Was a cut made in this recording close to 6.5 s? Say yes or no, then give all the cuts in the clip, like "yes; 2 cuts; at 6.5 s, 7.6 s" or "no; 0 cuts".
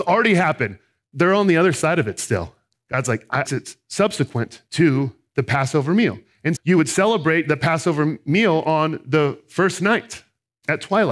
yes; 2 cuts; at 3.4 s, 6.5 s